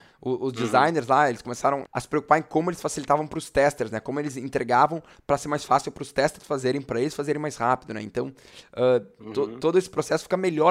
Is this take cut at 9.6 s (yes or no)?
no